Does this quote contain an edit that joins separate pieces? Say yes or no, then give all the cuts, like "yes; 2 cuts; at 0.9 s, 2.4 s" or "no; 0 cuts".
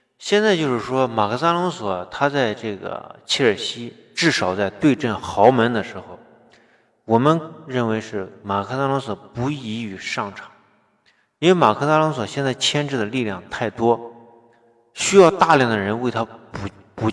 no; 0 cuts